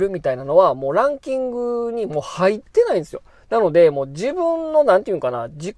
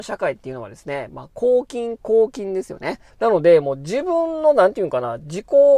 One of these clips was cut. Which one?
second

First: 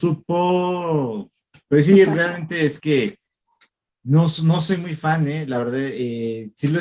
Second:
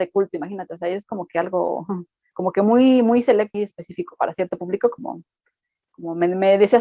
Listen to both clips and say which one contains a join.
second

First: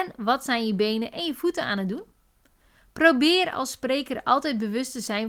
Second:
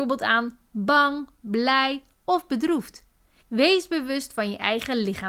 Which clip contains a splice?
second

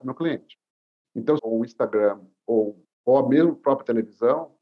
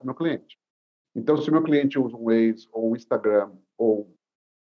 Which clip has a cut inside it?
first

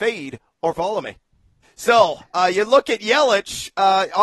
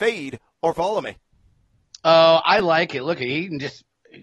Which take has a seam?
first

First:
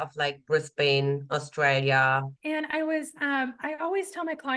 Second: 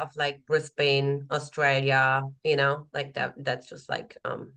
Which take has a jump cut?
first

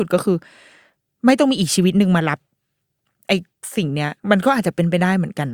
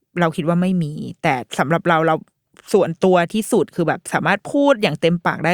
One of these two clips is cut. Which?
first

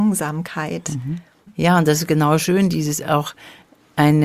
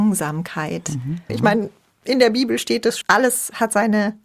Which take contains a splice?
second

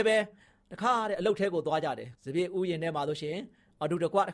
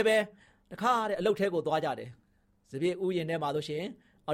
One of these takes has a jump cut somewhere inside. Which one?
first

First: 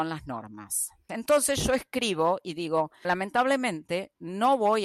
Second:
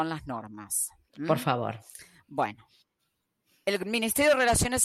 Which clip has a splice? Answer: first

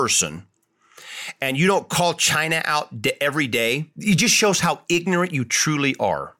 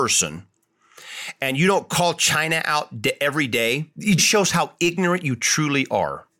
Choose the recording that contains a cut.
second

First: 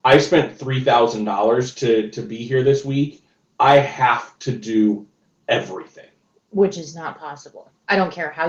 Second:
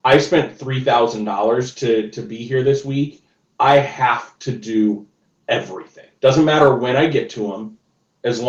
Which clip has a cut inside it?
second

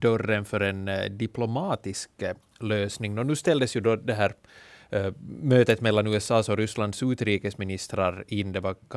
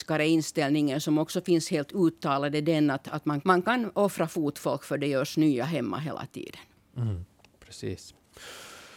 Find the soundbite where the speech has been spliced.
second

